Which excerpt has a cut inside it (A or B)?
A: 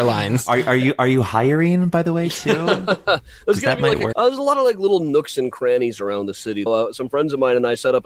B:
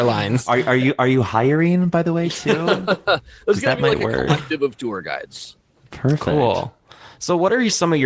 A